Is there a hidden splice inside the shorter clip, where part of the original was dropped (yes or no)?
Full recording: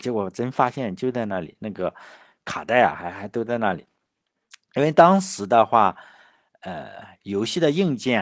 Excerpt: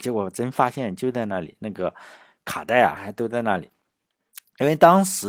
yes